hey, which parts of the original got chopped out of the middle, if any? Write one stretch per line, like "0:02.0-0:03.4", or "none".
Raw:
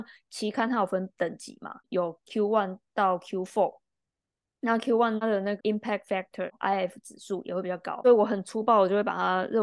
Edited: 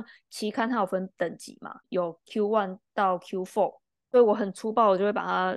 0:04.1-0:08.0